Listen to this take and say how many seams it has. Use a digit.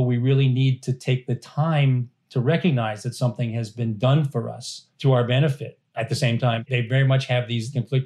1